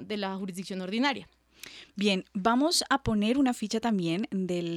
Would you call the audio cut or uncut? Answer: uncut